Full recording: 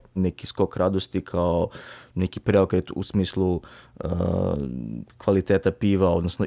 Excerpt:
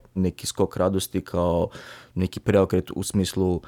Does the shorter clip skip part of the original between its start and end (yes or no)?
no